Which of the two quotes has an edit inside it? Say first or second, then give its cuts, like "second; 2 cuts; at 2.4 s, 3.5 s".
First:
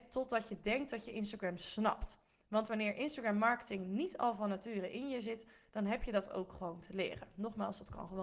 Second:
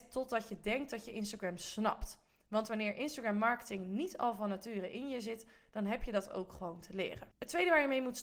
second; 1 cut; at 7.3 s